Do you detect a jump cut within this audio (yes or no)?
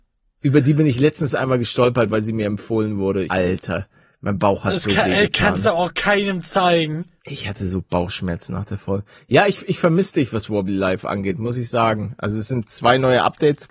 yes